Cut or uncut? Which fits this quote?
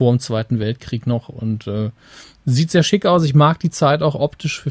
uncut